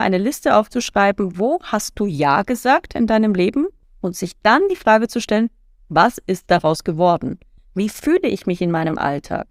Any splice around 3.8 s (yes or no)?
yes